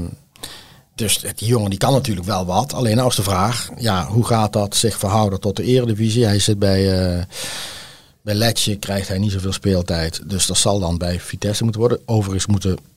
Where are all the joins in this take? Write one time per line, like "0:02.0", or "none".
none